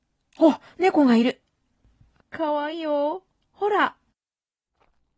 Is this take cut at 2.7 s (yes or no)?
yes